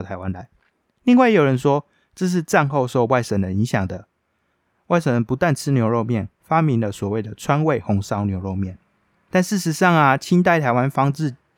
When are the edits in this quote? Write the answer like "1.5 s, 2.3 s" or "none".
6.4 s